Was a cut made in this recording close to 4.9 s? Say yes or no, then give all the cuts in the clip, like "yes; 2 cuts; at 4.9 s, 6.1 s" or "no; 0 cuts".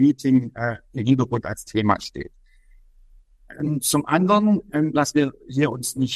yes; 1 cut; at 4.9 s